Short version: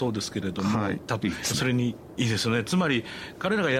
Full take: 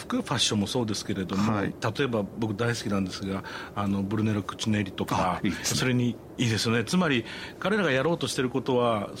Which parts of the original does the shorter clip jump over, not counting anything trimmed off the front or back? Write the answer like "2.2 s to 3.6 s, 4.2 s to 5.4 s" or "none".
1.9 s to 5.4 s